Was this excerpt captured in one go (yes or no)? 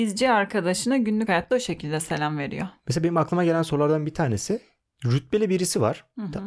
yes